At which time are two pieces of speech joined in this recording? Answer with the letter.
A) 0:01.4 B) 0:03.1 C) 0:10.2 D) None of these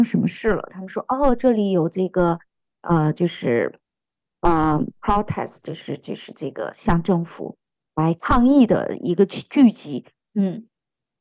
C